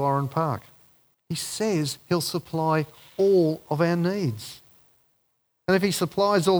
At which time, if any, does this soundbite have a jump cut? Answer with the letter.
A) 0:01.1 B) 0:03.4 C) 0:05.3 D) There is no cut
A